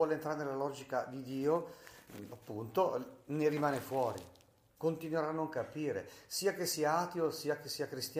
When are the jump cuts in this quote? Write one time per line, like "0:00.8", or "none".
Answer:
none